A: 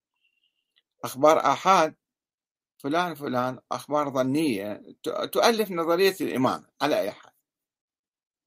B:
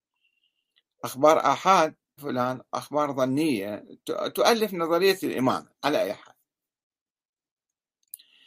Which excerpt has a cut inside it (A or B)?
B